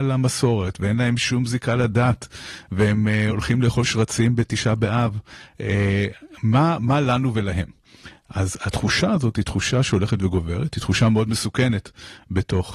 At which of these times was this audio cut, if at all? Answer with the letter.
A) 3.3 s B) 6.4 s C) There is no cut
C